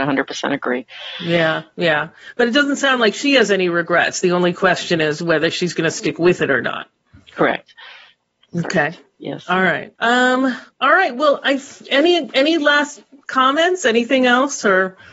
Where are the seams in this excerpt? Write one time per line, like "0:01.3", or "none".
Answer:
0:10.0

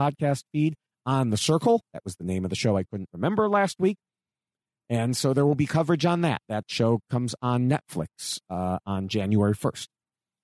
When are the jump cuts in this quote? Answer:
none

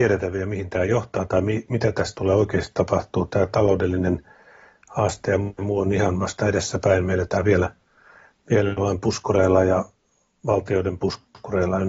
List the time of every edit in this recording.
none

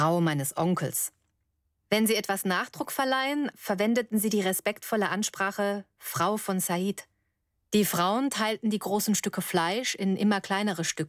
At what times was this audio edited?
0:03.5
0:07.6

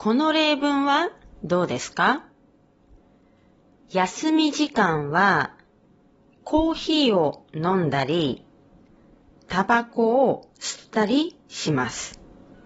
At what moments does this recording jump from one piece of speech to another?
none

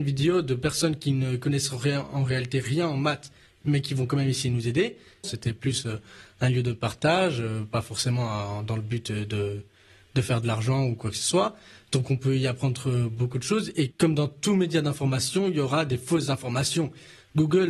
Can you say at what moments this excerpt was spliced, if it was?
0:05.2

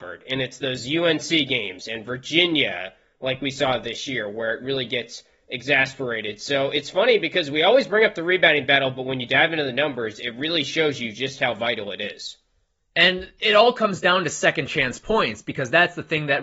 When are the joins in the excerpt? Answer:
none

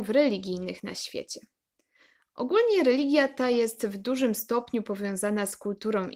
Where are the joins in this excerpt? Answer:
none

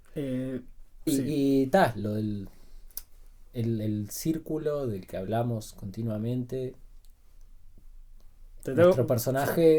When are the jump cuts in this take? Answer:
0:01.1
0:08.6

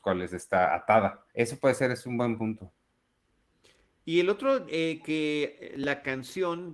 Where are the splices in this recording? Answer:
0:01.3

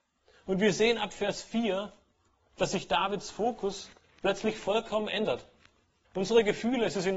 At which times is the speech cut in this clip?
0:06.0

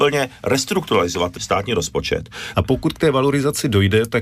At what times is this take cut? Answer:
0:01.4
0:02.5

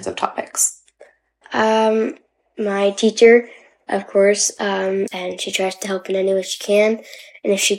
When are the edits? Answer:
0:01.4
0:05.1

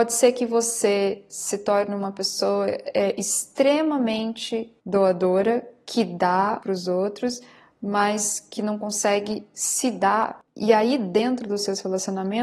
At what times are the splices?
0:06.6

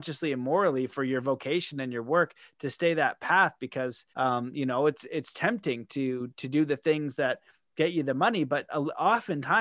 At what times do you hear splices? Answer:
0:04.1

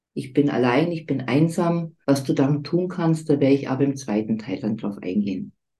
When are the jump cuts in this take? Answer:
0:02.0

